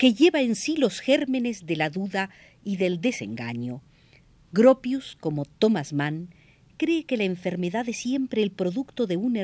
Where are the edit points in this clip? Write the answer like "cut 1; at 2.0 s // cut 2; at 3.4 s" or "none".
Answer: none